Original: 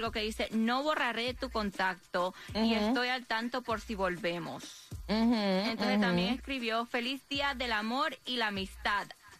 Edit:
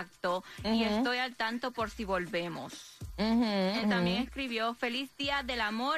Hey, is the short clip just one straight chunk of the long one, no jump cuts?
no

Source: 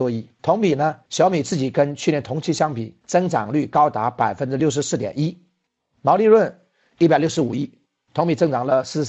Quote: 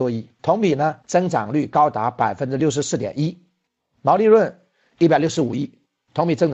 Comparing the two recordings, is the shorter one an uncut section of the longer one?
no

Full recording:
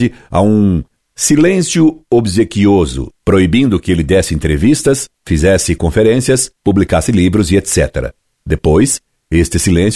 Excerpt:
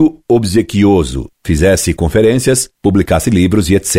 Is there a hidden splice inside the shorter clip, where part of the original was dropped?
yes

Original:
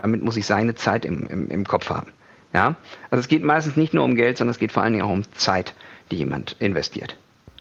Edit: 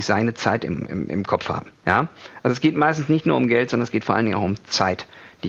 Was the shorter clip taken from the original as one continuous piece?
no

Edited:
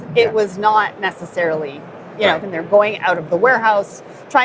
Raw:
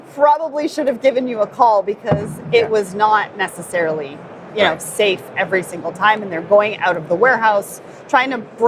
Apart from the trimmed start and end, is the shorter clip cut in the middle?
yes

